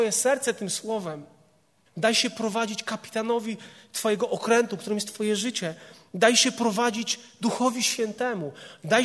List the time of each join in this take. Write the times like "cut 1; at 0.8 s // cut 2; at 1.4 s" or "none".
cut 1; at 1.9 s